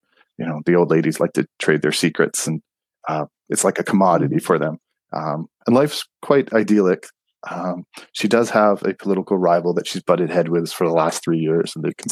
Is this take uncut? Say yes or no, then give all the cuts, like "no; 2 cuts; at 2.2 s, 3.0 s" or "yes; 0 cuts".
yes; 0 cuts